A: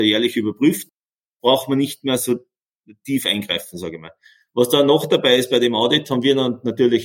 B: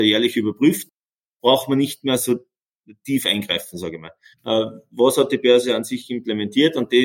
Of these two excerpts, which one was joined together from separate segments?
B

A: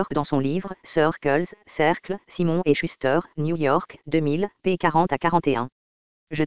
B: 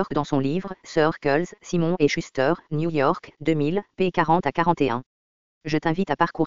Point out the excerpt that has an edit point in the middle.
B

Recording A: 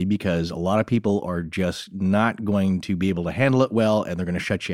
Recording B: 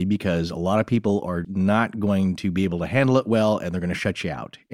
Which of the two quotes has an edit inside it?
B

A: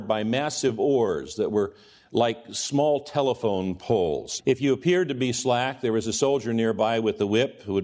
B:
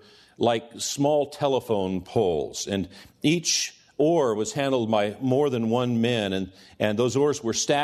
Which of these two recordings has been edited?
A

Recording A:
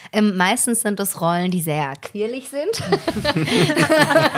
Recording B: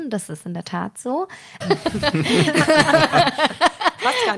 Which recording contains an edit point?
B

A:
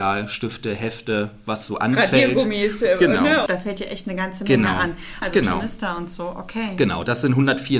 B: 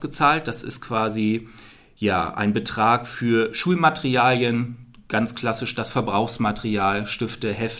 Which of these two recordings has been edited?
A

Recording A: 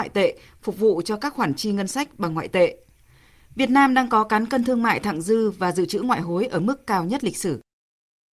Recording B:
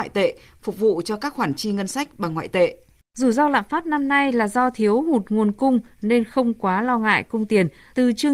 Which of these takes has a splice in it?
B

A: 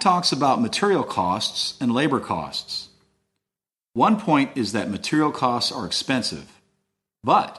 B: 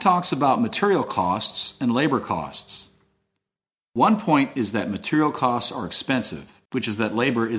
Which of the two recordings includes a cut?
B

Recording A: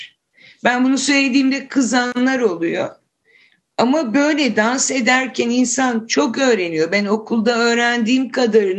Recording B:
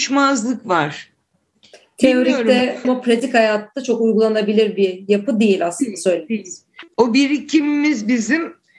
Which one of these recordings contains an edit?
B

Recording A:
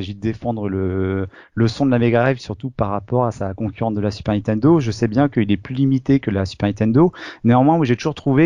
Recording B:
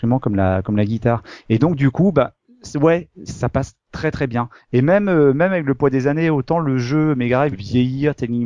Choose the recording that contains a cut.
B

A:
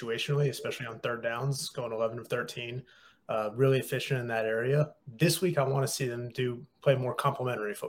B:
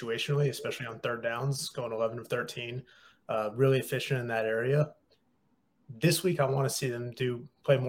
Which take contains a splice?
A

